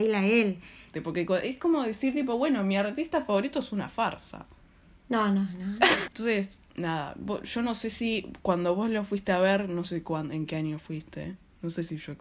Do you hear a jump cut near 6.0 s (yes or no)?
yes